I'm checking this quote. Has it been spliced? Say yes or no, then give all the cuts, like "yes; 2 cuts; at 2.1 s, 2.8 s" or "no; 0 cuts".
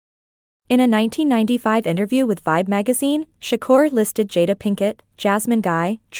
no; 0 cuts